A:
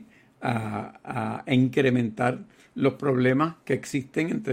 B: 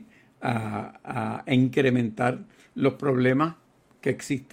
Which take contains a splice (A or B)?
A